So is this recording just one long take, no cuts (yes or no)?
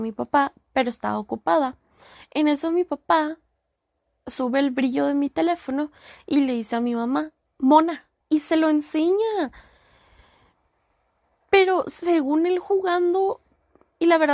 no